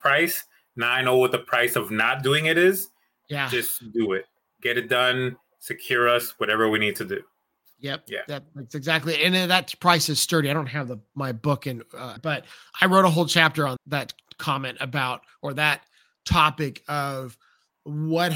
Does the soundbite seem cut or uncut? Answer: cut